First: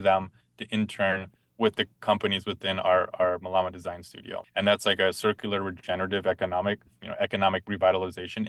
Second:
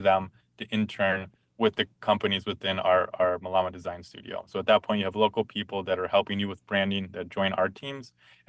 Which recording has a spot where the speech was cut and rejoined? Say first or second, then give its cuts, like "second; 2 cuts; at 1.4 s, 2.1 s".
first; 1 cut; at 4.4 s